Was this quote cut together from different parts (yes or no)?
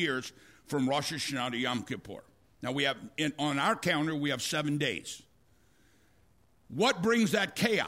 no